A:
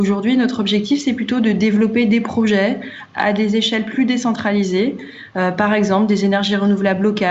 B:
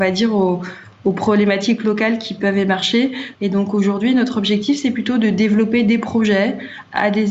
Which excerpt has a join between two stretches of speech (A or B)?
B